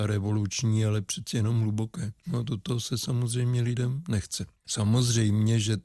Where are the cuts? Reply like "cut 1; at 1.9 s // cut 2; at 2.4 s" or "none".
cut 1; at 4.6 s